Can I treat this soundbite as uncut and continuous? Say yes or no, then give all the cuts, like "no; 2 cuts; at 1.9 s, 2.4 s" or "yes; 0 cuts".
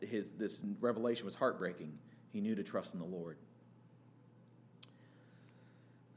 yes; 0 cuts